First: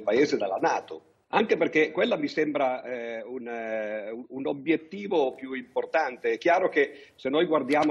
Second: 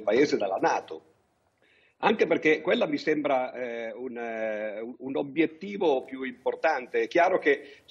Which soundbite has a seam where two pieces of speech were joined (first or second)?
first